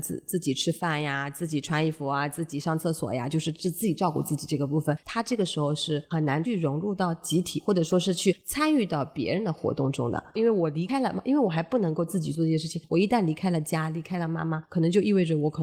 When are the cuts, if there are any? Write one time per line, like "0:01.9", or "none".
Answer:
0:05.0
0:10.3